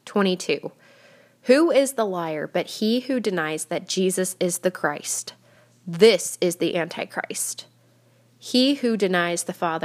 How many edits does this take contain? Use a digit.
0